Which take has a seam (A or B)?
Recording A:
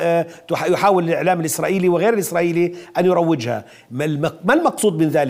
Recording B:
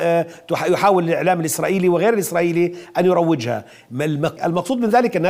B